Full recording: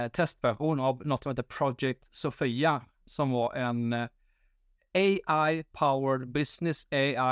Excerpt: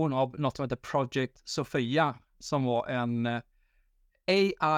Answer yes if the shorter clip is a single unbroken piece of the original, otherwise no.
yes